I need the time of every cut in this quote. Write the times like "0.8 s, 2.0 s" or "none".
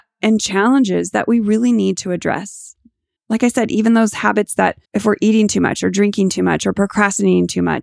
3.2 s, 4.8 s